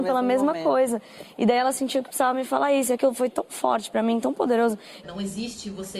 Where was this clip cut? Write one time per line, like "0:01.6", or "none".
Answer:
0:05.0